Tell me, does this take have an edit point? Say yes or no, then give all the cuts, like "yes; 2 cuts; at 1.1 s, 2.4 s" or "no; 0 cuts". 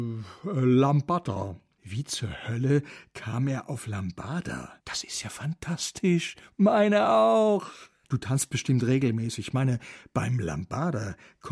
yes; 1 cut; at 8.0 s